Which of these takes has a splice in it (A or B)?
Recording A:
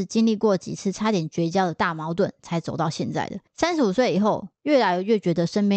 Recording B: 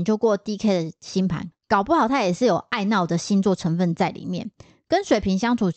A